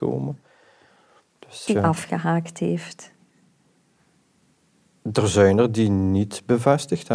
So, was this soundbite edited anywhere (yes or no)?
yes